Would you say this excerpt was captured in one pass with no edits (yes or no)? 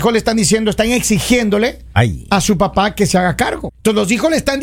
no